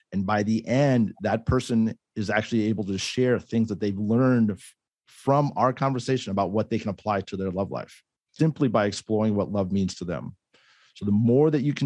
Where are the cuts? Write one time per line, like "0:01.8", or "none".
0:08.4